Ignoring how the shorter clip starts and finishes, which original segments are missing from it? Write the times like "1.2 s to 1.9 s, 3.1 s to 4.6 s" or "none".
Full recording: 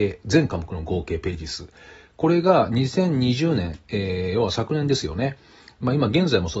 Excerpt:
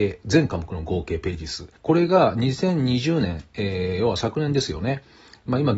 1.8 s to 2.1 s